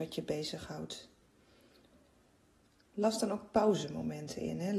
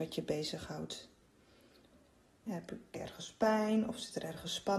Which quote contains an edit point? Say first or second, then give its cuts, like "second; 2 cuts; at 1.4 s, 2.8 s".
second; 1 cut; at 2.5 s